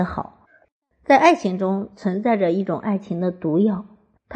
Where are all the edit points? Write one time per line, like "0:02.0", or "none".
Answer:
0:00.9